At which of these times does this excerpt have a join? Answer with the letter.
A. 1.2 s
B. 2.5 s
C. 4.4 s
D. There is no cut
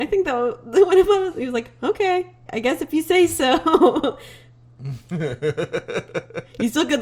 B